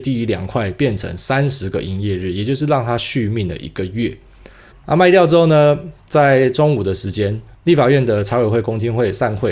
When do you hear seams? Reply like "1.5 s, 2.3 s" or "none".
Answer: 4.7 s, 7.5 s